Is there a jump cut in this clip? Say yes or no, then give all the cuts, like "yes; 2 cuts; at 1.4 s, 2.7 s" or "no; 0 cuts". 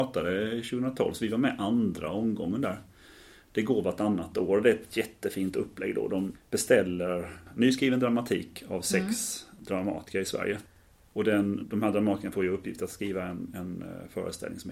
yes; 1 cut; at 11.6 s